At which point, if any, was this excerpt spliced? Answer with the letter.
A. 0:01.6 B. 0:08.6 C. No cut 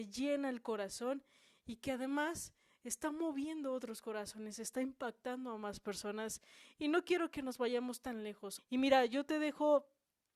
B